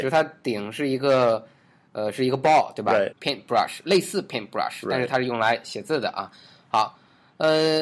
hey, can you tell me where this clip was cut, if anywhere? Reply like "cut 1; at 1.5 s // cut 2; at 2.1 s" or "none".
cut 1; at 3.1 s